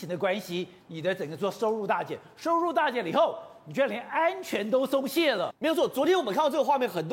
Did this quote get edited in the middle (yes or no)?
no